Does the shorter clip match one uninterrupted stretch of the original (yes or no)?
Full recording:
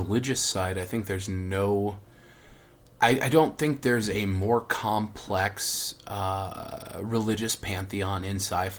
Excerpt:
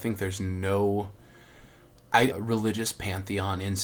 no